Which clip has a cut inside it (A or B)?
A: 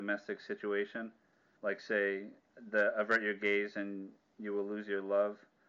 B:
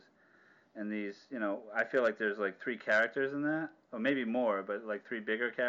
A